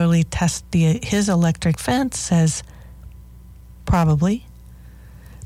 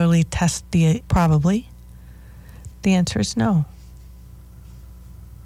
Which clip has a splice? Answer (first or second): second